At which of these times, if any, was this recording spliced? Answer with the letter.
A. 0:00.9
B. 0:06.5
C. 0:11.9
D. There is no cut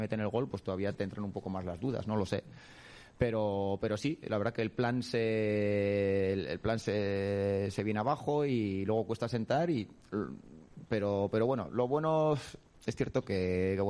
A